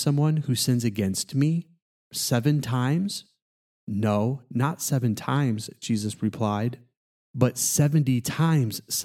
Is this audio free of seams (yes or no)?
yes